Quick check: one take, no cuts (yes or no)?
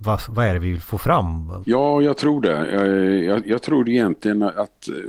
no